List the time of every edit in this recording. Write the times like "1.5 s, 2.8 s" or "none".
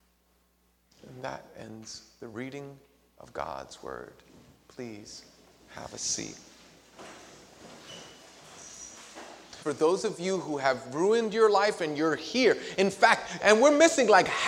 9.6 s, 13.4 s